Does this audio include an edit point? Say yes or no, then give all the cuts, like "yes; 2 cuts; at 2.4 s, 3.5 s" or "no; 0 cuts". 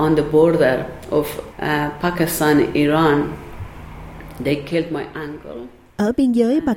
yes; 1 cut; at 1.5 s